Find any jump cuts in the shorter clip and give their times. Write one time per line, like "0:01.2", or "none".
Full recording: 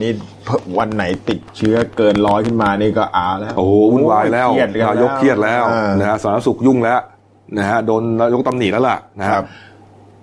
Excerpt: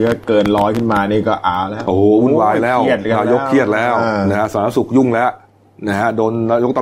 none